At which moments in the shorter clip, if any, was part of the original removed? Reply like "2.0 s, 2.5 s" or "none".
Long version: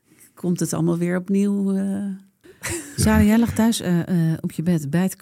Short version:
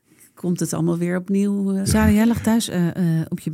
1.8 s